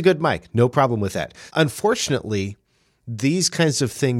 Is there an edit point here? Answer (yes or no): yes